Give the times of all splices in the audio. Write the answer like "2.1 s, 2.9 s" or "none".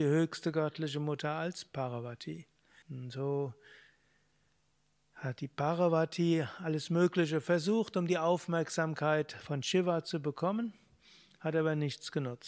2.8 s